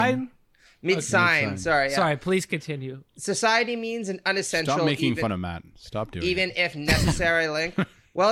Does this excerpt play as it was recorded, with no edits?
yes; 0 cuts

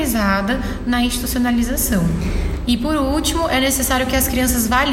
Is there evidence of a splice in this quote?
yes; 1 cut; at 2.7 s

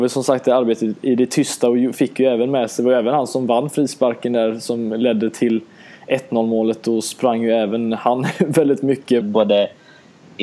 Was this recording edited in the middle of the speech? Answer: yes; 1 cut; at 9.2 s

